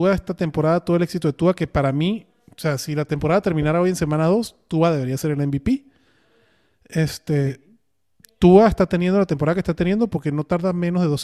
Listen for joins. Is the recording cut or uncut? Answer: uncut